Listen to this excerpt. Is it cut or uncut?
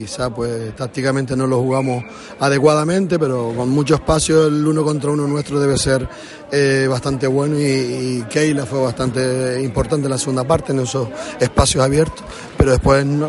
uncut